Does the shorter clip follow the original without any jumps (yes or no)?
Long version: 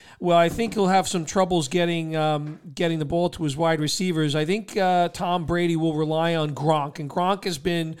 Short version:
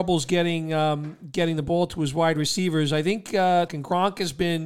no